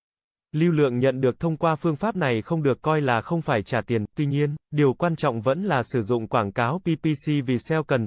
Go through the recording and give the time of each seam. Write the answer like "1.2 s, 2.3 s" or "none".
4.6 s